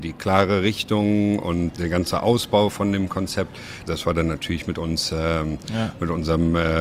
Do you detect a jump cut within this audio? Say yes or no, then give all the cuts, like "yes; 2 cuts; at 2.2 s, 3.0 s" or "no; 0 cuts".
yes; 2 cuts; at 1.7 s, 3.9 s